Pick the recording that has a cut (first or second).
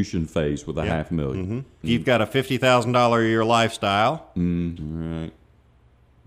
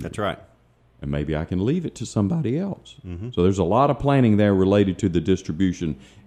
first